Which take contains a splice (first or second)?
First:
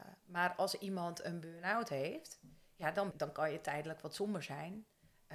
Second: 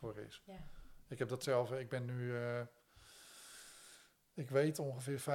first